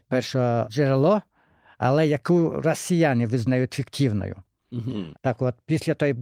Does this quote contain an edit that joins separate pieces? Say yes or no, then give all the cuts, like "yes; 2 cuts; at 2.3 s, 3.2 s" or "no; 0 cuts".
yes; 1 cut; at 5.1 s